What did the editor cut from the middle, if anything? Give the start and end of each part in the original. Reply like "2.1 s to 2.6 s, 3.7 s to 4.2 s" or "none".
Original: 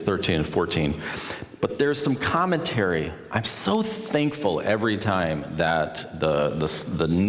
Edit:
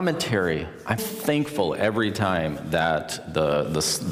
3.4 s to 3.8 s